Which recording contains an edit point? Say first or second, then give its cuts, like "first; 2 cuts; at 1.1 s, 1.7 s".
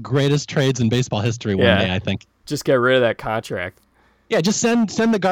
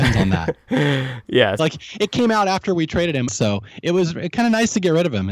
second; 2 cuts; at 1.6 s, 3.3 s